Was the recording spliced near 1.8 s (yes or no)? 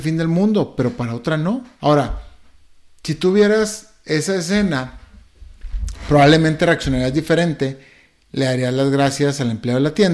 yes